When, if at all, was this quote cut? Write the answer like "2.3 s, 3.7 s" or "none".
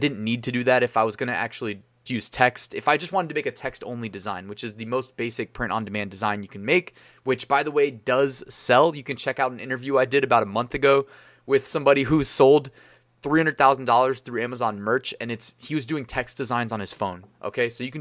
2.1 s